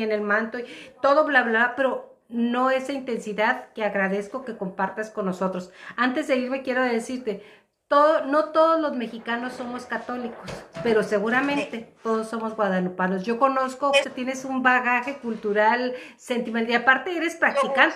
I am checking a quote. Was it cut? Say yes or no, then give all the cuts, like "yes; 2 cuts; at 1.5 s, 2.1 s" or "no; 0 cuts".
yes; 1 cut; at 14.0 s